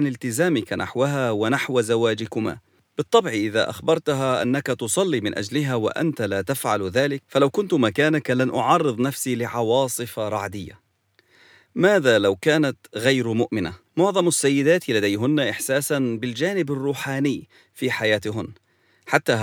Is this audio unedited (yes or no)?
no